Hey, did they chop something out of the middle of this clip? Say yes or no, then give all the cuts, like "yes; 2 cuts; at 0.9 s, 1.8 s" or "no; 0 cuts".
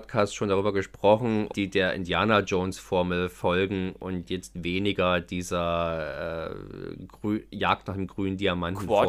yes; 1 cut; at 1.5 s